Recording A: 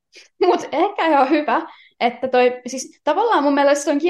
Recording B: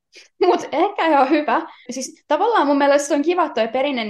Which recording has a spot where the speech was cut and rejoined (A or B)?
B